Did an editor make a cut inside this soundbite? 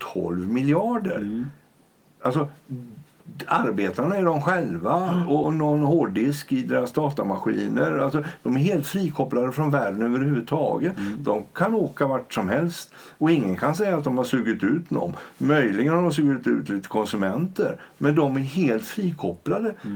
yes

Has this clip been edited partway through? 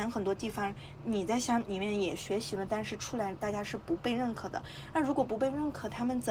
no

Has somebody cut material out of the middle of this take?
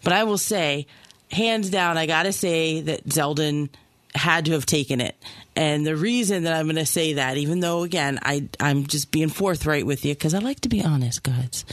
no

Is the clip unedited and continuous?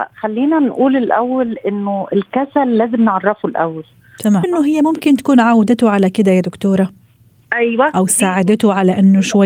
no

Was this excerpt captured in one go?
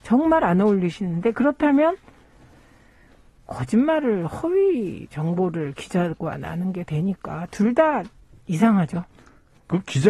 yes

